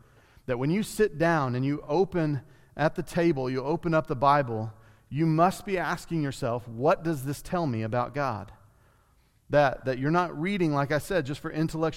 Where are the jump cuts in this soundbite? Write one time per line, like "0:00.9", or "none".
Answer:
none